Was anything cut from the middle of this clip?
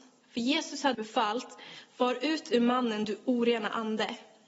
yes; 1 cut; at 0.9 s

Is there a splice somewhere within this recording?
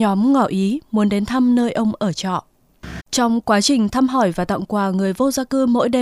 yes; 1 cut; at 3.0 s

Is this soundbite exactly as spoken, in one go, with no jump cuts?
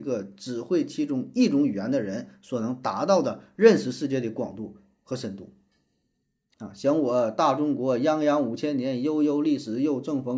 no; 1 cut; at 6.5 s

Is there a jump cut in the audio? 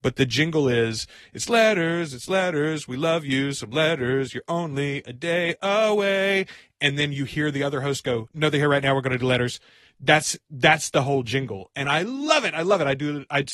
no; 0 cuts

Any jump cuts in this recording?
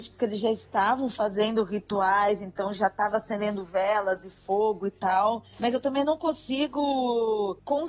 no; 0 cuts

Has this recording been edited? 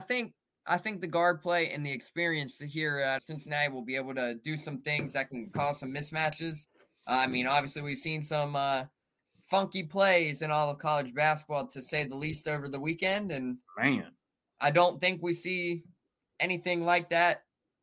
yes; 1 cut; at 3.2 s

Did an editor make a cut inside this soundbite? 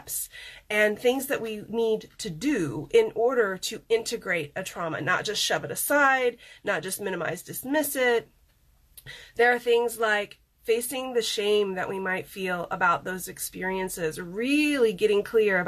no; 0 cuts

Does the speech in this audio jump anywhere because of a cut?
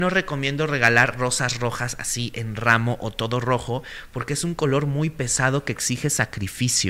no; 0 cuts

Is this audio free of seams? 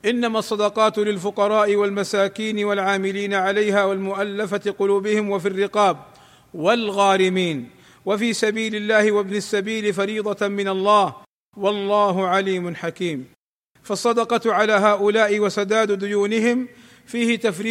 yes; 0 cuts

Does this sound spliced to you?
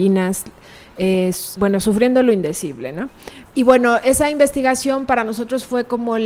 yes; 2 cuts; at 1.6 s, 3.5 s

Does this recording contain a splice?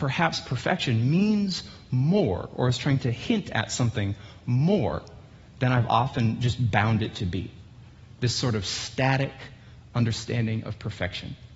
no; 0 cuts

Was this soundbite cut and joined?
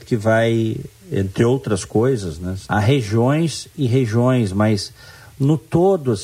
yes; 1 cut; at 2.7 s

